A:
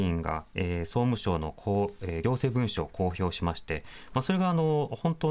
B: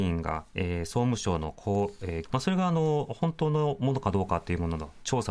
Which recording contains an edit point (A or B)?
B